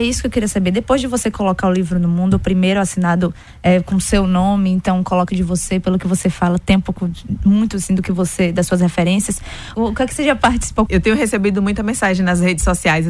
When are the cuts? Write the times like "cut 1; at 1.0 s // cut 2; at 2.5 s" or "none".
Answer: cut 1; at 5.3 s // cut 2; at 9.7 s // cut 3; at 10.9 s